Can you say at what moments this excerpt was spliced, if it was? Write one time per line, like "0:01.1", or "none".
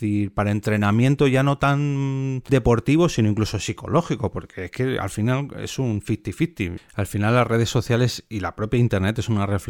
0:02.5
0:06.8